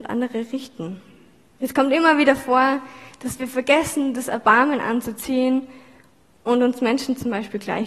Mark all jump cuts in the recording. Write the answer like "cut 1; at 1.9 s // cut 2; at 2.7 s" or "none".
cut 1; at 1.6 s